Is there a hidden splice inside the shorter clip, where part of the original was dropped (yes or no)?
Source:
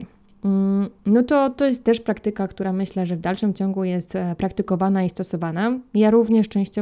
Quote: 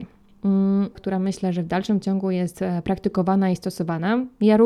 yes